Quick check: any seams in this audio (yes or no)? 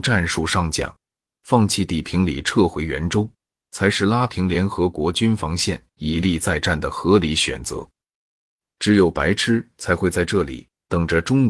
no